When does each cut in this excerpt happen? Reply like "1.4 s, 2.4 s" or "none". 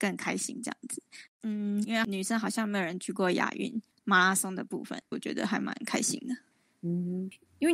1.8 s, 5.1 s